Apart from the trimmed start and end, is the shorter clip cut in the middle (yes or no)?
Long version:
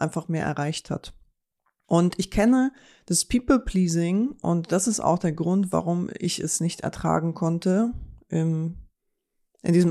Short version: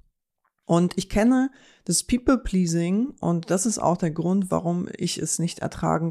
no